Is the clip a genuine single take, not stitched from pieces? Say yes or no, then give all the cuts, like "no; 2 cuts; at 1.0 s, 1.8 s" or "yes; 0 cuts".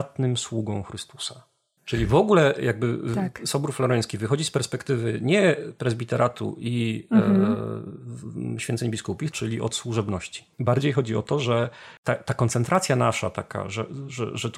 no; 3 cuts; at 1.8 s, 9.3 s, 10.5 s